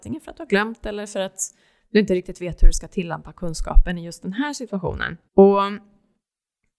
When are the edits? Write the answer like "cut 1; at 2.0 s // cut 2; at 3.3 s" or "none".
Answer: cut 1; at 5.3 s